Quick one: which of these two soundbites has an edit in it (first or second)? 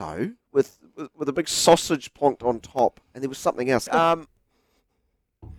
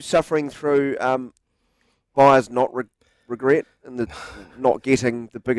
first